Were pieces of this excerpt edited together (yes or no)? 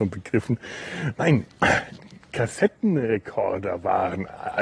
yes